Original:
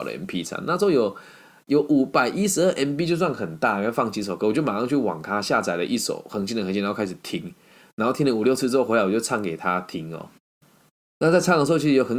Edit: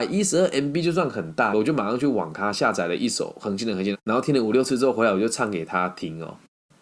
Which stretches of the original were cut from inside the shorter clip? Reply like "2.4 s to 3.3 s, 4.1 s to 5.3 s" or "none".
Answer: 3.8 s to 4.4 s, 6.8 s to 7.8 s

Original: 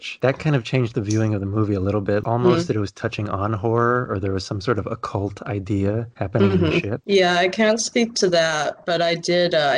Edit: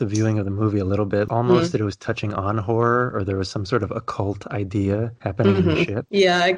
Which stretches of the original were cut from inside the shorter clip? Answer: none

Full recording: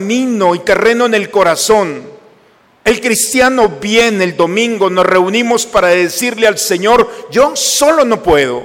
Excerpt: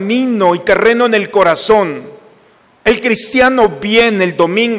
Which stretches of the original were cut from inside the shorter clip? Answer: none

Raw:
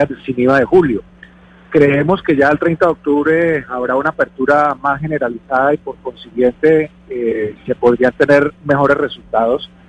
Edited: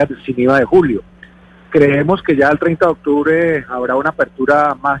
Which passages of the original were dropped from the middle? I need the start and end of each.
none

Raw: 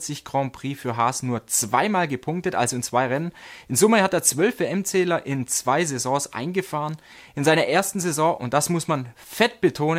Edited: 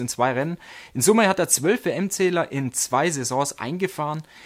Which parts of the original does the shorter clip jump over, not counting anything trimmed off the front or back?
none

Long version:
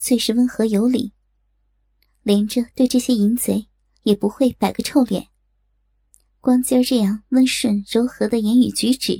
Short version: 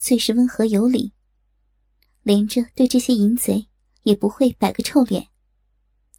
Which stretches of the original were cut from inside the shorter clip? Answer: none

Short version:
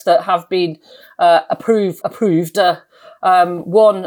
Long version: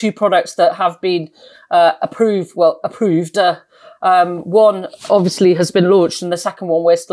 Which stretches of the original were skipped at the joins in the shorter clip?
2.5 s to 2.8 s

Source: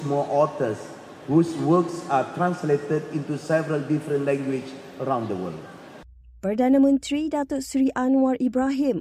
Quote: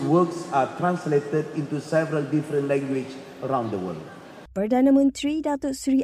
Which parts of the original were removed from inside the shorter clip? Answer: 6.1 s to 6.4 s

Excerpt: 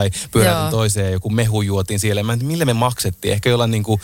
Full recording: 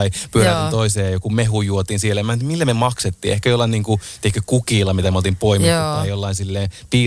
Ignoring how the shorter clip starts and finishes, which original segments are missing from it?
none

